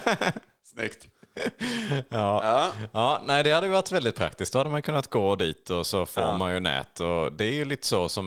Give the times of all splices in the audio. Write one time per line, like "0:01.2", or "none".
none